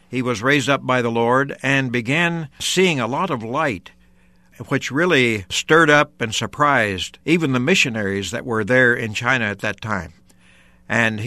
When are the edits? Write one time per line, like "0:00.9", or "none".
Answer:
none

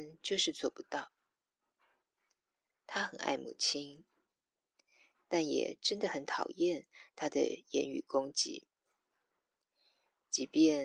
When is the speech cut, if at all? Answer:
0:02.7

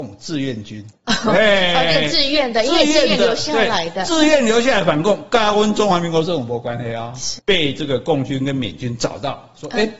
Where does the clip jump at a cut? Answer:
0:01.0
0:07.4

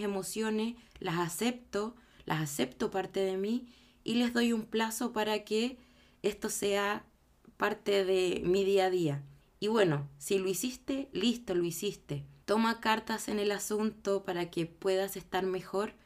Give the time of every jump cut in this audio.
0:09.4
0:12.4

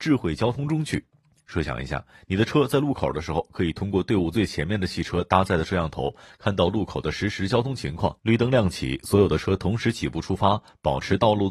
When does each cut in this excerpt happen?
0:08.2

